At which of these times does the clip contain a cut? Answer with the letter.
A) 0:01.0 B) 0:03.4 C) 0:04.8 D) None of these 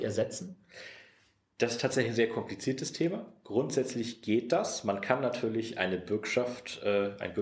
D